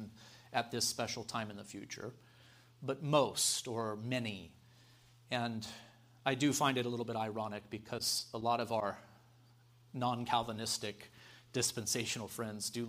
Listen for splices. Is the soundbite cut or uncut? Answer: uncut